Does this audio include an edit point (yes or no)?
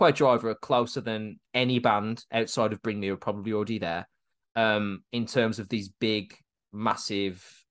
no